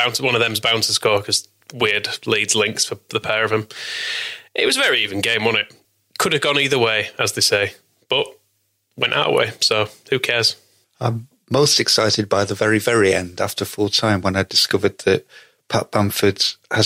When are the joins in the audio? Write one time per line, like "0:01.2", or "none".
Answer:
none